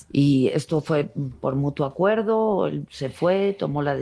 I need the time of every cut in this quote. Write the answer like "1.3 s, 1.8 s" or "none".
none